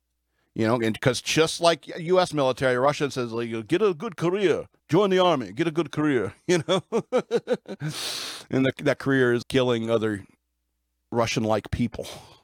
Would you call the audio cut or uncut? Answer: cut